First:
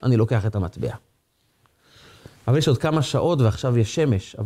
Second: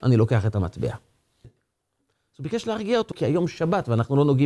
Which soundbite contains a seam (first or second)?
second